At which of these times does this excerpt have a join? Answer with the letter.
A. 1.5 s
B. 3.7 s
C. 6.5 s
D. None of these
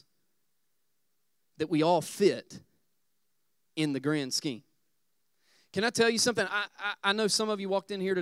D